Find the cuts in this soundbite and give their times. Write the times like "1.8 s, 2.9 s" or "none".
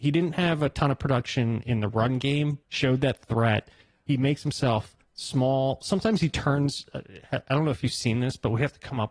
2.6 s, 4.1 s